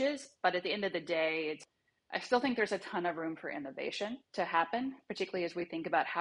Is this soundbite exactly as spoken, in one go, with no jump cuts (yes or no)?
no